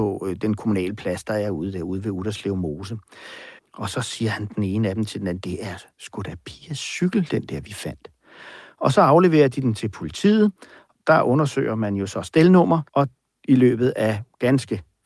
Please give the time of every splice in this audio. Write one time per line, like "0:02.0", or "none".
0:03.6
0:11.0
0:12.9